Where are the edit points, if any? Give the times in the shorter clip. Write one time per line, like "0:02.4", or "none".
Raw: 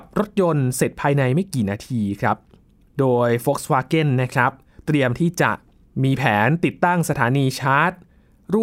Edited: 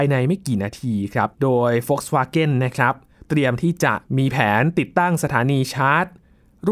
0:01.3
0:04.1